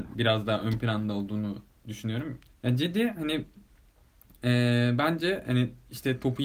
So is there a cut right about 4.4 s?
no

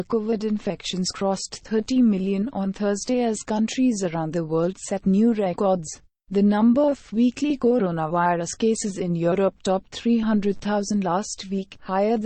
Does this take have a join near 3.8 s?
no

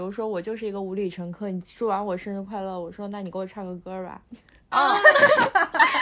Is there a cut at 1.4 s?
no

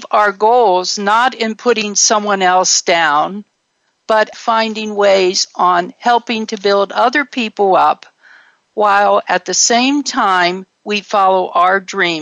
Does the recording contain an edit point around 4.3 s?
yes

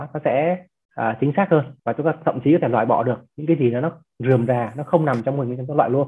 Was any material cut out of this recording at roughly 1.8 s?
yes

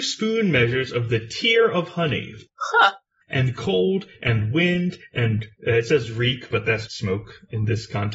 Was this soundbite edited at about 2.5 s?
yes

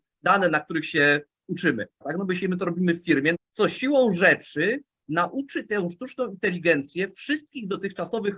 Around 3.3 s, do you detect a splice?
yes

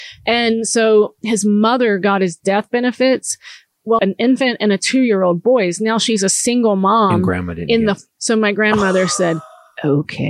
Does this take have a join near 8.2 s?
yes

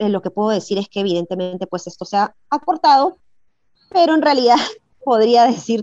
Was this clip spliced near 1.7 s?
no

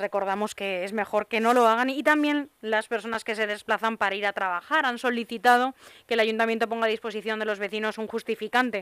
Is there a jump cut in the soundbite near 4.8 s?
no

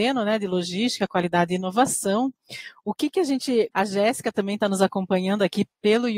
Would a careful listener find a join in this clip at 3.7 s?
yes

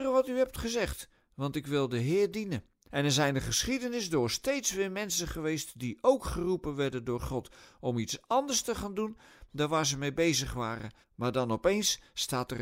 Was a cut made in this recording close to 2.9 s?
yes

